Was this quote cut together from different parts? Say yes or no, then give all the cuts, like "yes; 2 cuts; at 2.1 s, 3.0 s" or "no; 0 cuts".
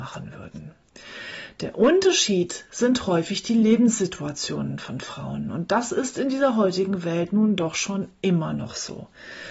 no; 0 cuts